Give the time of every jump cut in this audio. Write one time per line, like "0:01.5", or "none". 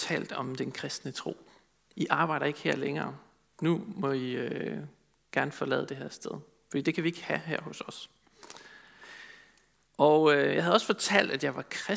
0:01.9
0:09.8

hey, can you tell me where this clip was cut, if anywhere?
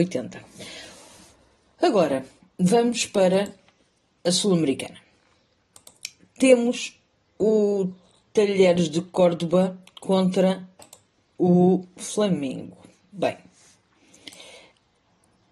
none

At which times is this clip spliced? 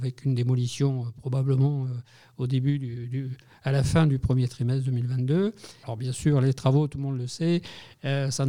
0:05.8

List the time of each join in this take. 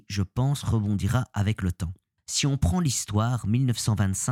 0:02.2

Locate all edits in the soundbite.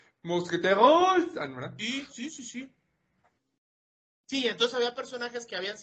none

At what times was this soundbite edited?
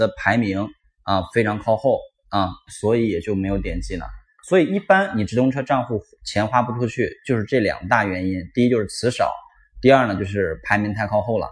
0:02.7

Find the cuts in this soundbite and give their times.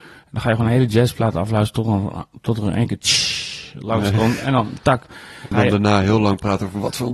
0:05.5

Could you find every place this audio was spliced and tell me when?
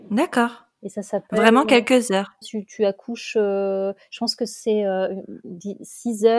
0:02.4

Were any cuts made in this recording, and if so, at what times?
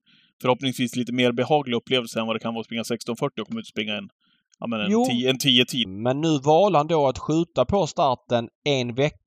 0:05.8

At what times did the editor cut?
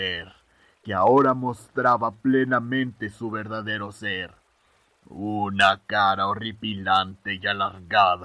none

